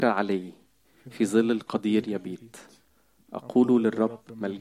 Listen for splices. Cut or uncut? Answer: uncut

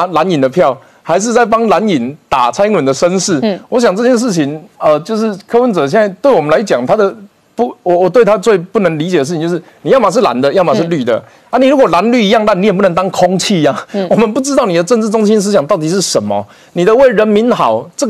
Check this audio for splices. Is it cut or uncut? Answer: uncut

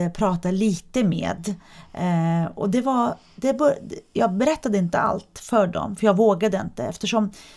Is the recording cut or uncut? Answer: uncut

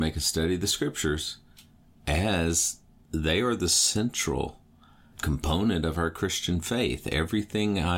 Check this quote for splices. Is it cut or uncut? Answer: cut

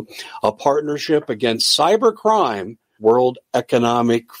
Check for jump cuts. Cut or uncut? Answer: cut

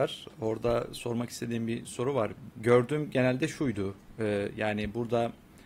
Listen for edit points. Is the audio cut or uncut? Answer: cut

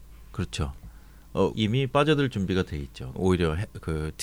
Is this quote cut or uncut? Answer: cut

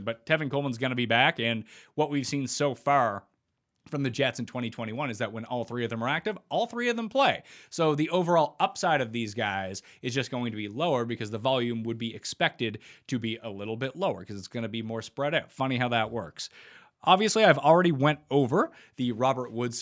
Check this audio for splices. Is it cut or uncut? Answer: uncut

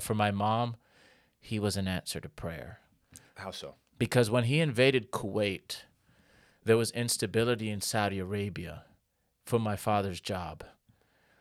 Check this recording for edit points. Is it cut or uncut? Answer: uncut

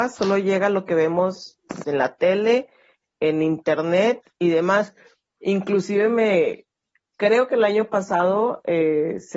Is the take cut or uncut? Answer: cut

